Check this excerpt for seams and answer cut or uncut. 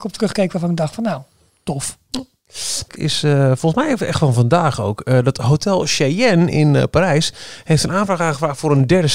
cut